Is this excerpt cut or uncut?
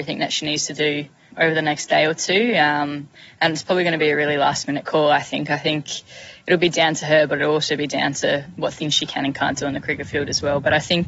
uncut